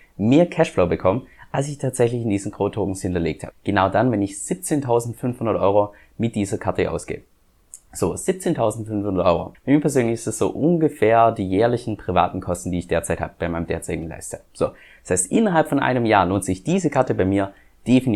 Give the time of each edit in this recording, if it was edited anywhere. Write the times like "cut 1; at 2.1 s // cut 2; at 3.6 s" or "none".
cut 1; at 3.6 s // cut 2; at 9.5 s